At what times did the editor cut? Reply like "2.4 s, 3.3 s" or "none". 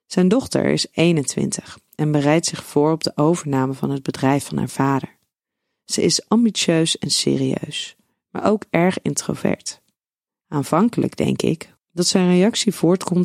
11.8 s

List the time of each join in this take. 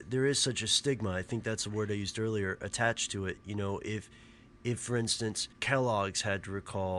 5.5 s

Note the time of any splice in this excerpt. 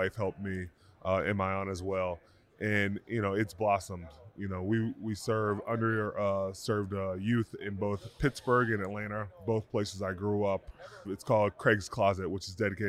11.0 s

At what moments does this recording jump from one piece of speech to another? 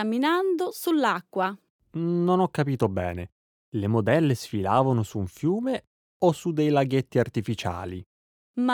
none

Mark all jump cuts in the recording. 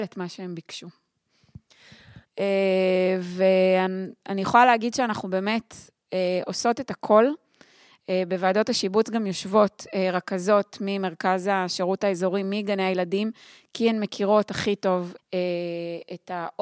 2.2 s, 15.2 s

